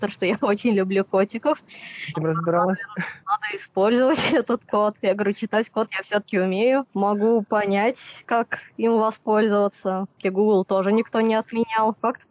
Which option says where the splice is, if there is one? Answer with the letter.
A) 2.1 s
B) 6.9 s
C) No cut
A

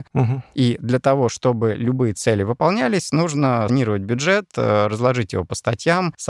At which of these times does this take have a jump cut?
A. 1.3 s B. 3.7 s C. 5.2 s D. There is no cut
B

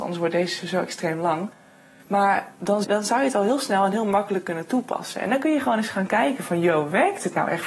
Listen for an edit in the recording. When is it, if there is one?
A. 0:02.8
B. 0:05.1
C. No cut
A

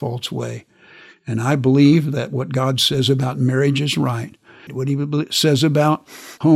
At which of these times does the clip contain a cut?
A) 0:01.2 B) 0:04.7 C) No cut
B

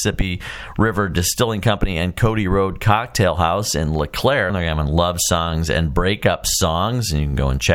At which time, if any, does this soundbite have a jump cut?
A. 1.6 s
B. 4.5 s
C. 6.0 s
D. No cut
B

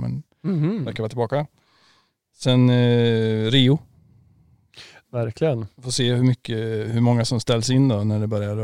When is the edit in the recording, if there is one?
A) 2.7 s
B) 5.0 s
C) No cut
B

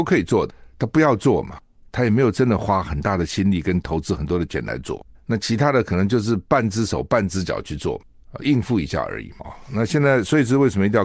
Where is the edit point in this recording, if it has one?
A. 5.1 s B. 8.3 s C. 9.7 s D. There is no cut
A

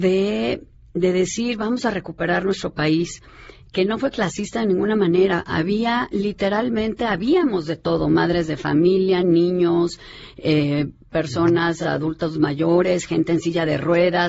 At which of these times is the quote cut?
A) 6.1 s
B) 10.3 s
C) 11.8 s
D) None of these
D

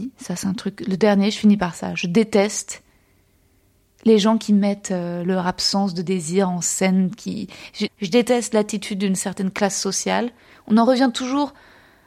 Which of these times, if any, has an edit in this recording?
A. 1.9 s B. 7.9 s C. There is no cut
B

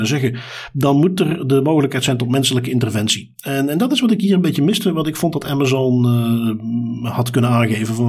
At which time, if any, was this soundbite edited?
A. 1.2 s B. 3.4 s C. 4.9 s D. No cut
D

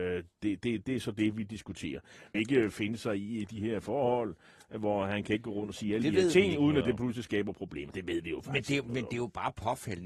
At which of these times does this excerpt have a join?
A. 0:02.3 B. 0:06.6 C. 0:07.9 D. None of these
A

